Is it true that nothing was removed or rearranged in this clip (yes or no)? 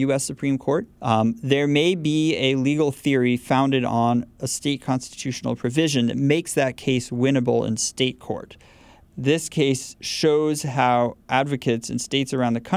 no